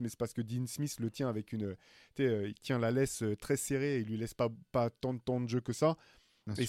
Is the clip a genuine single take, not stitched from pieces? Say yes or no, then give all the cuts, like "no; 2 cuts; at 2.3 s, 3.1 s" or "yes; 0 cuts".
yes; 0 cuts